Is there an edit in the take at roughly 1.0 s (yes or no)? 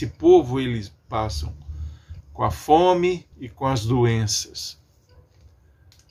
no